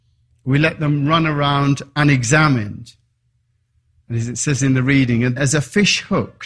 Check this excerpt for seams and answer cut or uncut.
cut